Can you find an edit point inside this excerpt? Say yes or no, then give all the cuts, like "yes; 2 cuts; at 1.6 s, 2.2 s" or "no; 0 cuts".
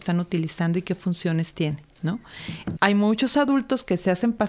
yes; 1 cut; at 2.8 s